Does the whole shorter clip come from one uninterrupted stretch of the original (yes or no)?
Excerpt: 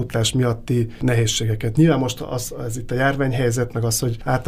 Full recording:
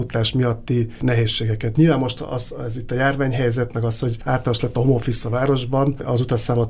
yes